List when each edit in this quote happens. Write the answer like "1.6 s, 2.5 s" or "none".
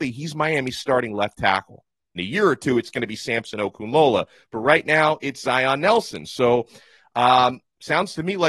2.2 s